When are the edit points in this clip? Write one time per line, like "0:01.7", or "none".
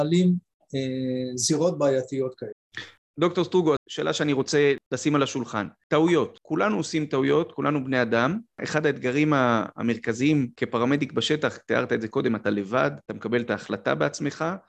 0:03.8